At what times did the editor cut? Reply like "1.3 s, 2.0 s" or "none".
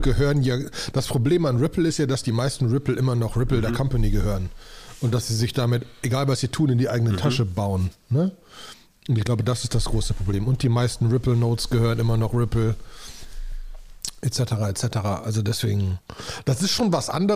none